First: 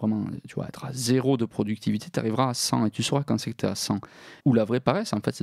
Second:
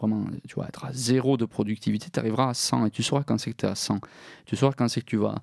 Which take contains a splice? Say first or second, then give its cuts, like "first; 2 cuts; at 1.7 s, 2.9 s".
first; 1 cut; at 4.4 s